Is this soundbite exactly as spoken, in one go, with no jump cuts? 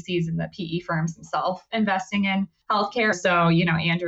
no; 1 cut; at 3.1 s

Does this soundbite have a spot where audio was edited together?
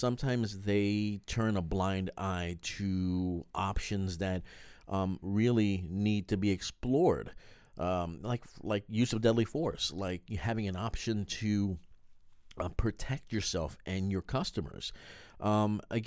no; 0 cuts

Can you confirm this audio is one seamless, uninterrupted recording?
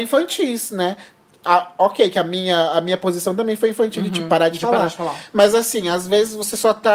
yes; 0 cuts

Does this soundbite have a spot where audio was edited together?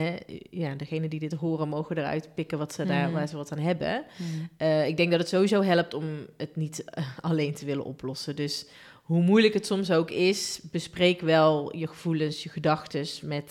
no; 0 cuts

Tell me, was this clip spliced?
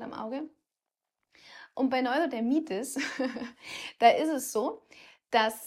no; 0 cuts

